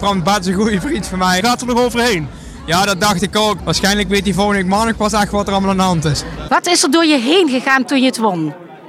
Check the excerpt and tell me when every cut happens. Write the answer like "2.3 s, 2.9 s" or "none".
1.4 s, 3.6 s, 6.5 s